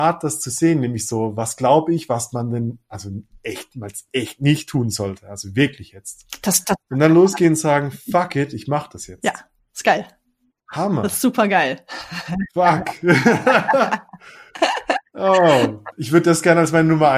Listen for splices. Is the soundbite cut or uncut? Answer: uncut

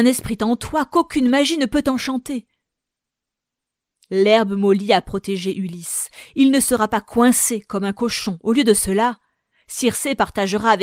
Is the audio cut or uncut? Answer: uncut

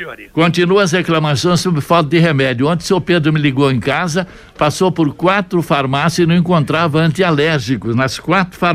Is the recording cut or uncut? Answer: uncut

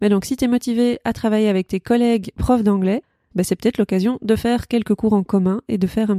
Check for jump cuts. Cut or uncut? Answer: cut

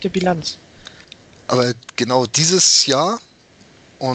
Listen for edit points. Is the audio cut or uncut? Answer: uncut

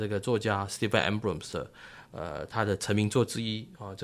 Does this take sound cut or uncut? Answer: uncut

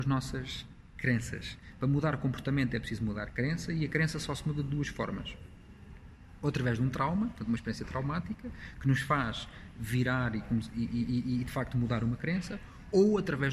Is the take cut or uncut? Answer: uncut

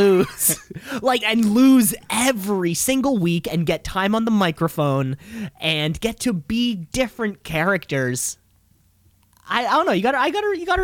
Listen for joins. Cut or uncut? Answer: cut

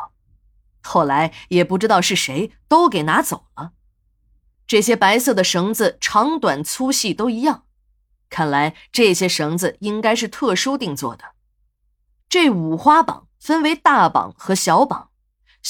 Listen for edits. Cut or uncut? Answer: cut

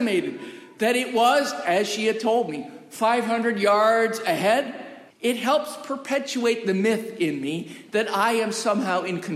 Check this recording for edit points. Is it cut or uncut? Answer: cut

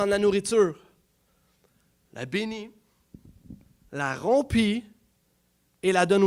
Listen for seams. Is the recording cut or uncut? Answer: uncut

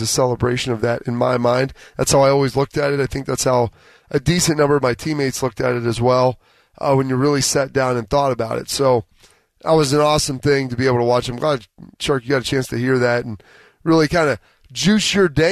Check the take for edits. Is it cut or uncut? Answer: uncut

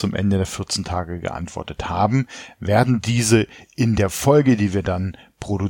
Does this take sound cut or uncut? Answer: uncut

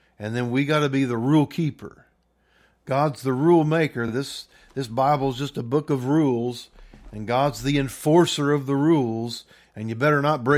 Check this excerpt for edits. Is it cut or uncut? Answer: uncut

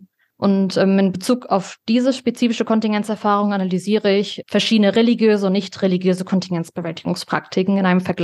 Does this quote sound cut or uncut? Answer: cut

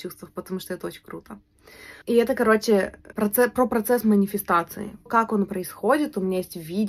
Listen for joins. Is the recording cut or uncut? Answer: cut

